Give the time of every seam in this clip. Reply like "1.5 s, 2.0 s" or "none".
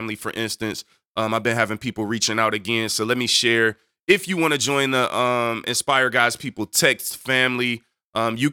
none